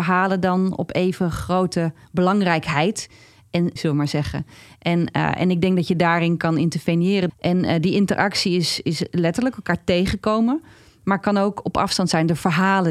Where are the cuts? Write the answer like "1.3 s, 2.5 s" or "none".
3.8 s, 7.3 s